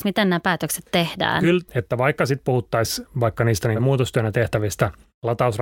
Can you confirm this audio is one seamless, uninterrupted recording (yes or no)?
no